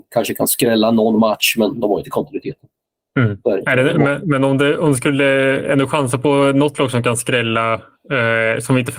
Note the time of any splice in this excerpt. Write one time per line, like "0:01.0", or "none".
none